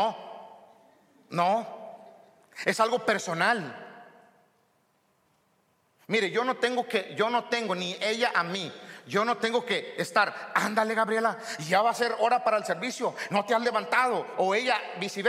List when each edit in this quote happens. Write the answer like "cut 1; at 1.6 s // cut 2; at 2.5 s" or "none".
none